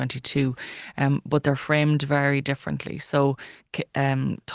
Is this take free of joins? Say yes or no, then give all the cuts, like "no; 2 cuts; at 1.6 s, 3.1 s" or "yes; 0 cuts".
yes; 0 cuts